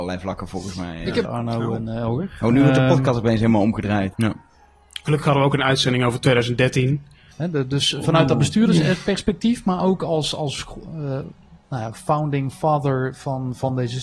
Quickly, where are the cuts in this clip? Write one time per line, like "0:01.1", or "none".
0:01.2
0:04.1
0:07.3